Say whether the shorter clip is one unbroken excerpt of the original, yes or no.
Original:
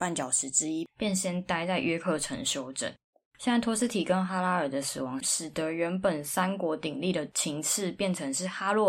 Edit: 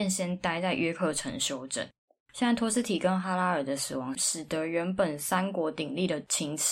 yes